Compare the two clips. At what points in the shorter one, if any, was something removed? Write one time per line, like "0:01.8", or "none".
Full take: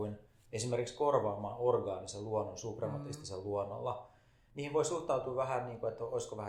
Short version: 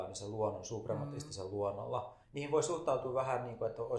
0:02.2